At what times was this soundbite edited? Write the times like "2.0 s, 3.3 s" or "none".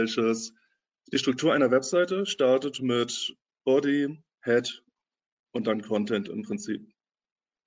none